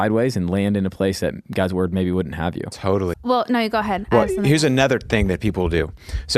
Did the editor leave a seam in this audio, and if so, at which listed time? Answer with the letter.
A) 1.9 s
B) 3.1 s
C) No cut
B